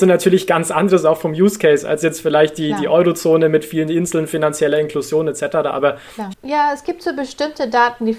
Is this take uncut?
no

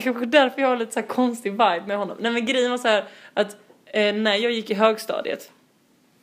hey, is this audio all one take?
yes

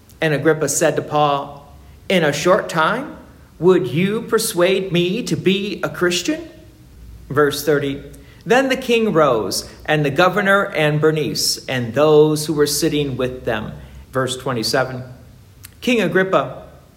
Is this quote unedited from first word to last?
no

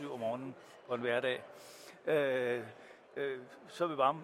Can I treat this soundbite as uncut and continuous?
yes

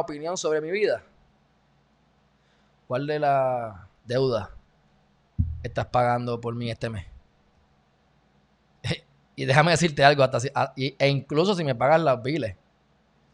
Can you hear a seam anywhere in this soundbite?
yes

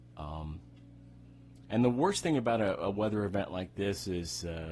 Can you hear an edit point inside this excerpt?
no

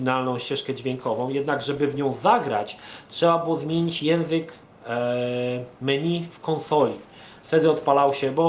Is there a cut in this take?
yes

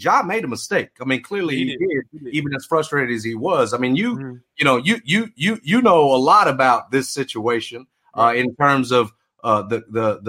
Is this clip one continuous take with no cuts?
yes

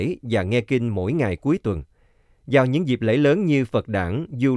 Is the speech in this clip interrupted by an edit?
no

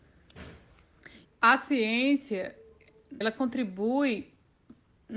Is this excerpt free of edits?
no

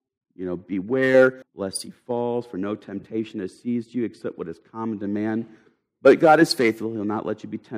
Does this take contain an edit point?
yes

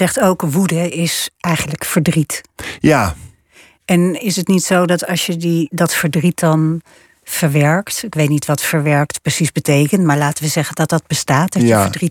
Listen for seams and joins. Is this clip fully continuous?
yes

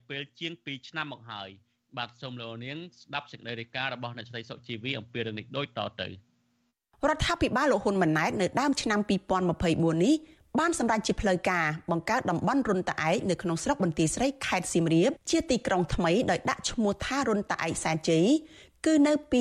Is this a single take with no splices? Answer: yes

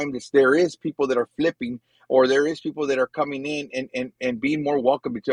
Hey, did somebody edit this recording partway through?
no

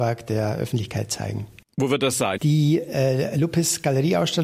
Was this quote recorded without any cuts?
no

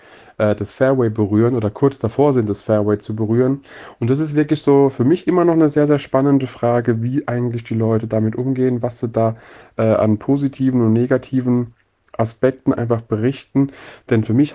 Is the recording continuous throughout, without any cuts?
yes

